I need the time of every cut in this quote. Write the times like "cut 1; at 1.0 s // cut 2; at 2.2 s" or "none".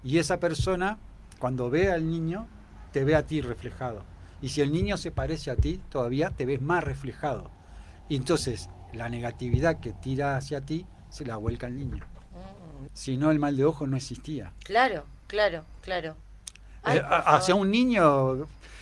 cut 1; at 12.9 s